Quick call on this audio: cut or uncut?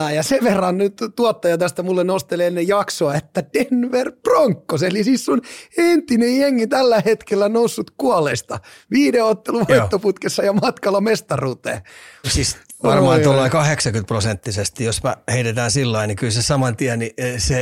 cut